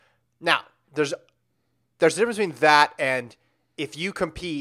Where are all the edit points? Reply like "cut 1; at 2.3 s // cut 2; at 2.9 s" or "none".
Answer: none

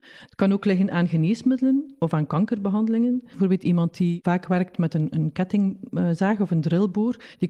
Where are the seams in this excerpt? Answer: cut 1; at 3.3 s

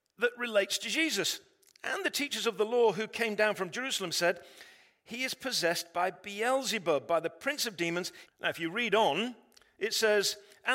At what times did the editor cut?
cut 1; at 8.3 s

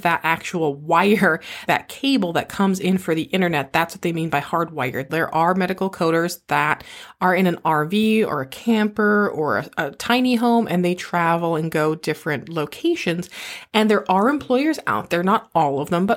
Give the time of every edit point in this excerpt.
cut 1; at 1.7 s // cut 2; at 5.1 s

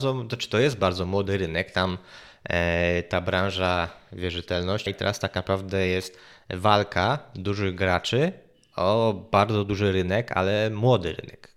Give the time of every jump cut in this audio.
cut 1; at 4.9 s

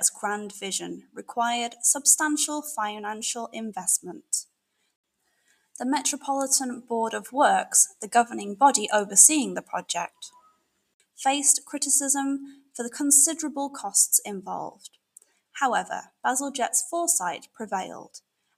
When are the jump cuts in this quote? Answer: none

